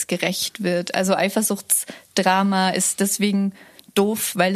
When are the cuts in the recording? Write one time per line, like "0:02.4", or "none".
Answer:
none

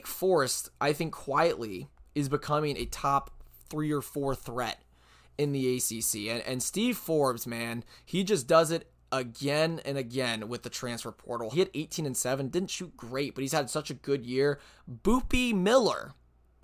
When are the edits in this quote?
0:11.5

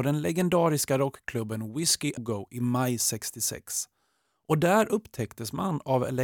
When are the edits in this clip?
0:02.2

